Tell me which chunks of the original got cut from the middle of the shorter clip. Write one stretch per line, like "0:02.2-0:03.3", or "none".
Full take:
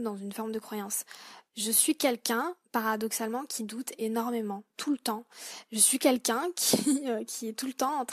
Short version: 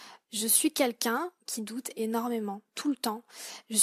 0:02.7-0:03.5